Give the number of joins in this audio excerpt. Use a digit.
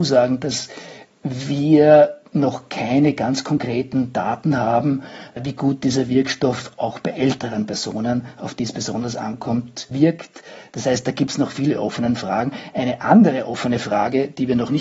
0